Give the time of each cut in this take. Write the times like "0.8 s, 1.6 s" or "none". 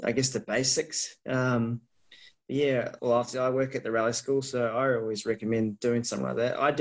3.0 s